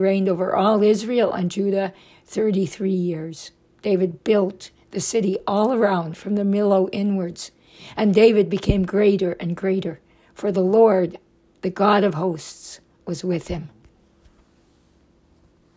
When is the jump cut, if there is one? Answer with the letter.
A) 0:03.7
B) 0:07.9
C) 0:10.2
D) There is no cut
A